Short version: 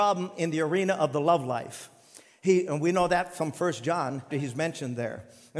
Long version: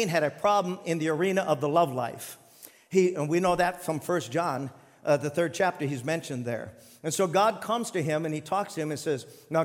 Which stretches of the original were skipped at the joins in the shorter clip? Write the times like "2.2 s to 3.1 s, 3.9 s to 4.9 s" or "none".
4.8 s to 5.8 s